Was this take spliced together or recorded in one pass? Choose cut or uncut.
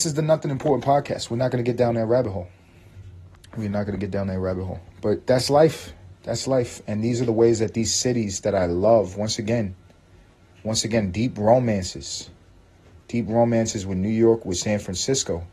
uncut